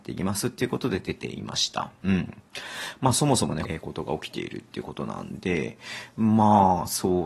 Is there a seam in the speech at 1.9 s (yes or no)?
no